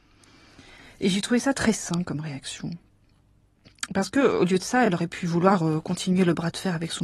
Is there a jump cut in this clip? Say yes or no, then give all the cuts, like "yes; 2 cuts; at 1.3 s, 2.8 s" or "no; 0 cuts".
no; 0 cuts